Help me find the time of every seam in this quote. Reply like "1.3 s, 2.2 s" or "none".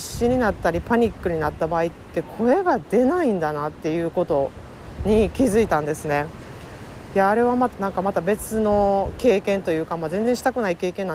7.7 s